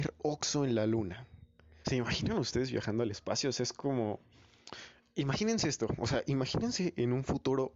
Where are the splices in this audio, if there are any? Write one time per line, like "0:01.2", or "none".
0:01.8

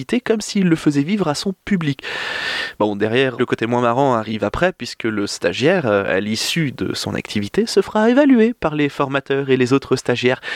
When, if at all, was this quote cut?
0:03.4

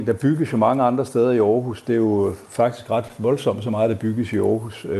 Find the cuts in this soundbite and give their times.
none

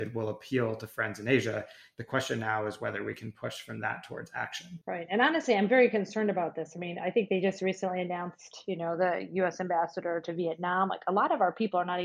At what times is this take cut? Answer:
0:04.8

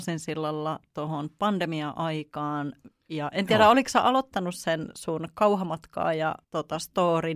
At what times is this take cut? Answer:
0:06.4

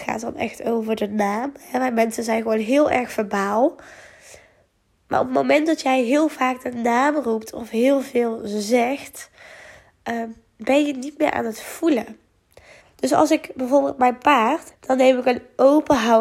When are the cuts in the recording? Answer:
0:12.8
0:14.7

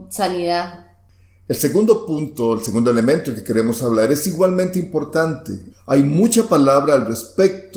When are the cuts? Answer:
0:05.7

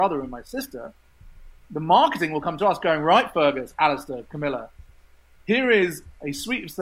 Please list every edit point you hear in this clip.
none

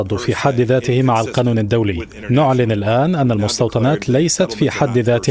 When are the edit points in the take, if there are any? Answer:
none

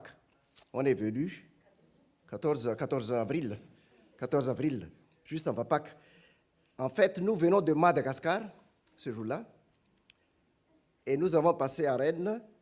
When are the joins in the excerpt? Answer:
none

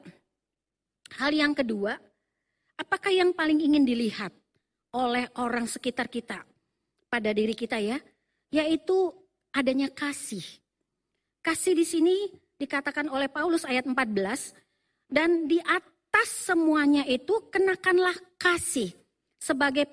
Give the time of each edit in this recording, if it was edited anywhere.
none

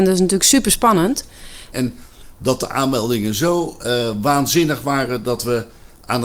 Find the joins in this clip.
0:01.7

